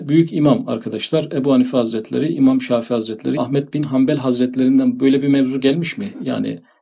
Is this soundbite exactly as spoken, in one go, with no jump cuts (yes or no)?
no